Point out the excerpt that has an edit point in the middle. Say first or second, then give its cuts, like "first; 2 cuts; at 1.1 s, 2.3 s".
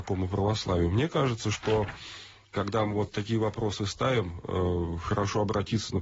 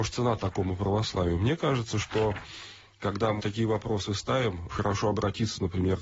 second; 2 cuts; at 3.4 s, 4.7 s